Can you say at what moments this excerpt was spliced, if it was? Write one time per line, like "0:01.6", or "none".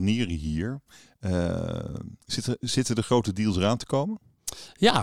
0:02.2